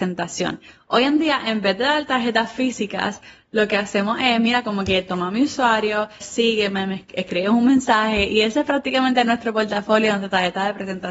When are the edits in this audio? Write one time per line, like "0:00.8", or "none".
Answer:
0:06.2